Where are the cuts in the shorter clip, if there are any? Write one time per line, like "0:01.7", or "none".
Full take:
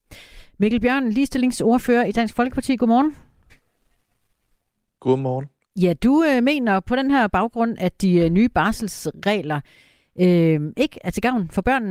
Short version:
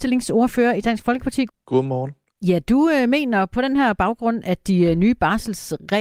0:01.5